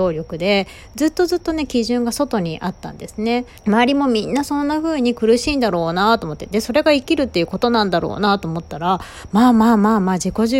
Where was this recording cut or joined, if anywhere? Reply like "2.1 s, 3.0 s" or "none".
3.6 s

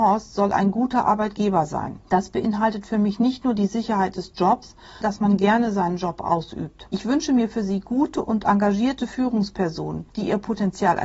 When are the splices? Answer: 5.0 s, 6.9 s

